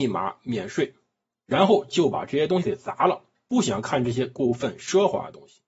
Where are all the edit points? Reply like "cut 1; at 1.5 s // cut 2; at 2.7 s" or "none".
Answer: cut 1; at 1.5 s